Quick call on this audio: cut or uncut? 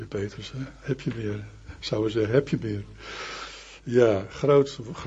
uncut